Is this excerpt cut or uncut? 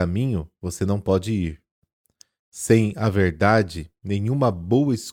uncut